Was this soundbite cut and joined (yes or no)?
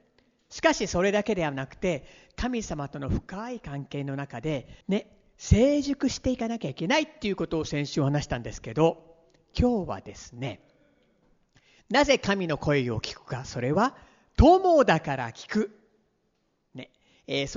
yes